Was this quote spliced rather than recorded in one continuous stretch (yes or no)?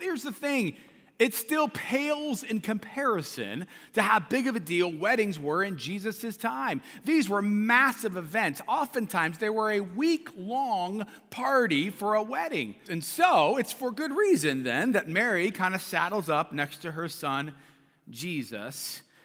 yes